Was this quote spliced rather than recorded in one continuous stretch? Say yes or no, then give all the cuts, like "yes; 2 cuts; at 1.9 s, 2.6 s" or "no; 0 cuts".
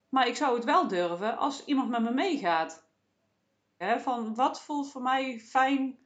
yes; 1 cut; at 3.8 s